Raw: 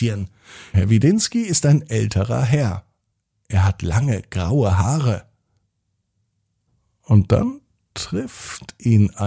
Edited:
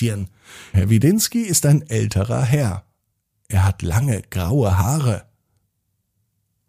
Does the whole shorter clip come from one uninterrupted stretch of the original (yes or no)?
yes